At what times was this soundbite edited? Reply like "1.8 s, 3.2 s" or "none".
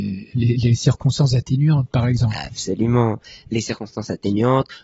none